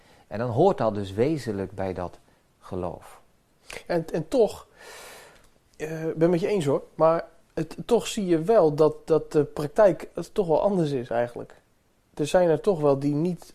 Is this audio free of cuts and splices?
yes; 0 cuts

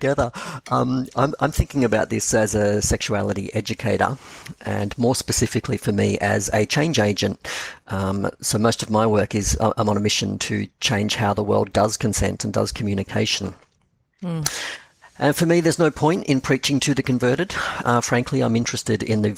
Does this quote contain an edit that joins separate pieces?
no; 0 cuts

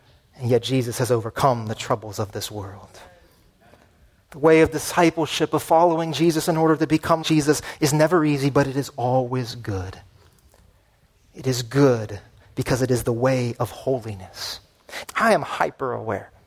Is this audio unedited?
no; 2 cuts; at 7.2 s, 15.0 s

